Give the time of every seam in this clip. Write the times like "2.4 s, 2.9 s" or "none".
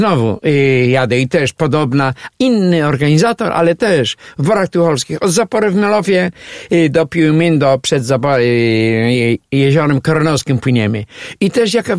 none